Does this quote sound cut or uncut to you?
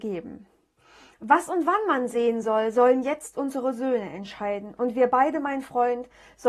uncut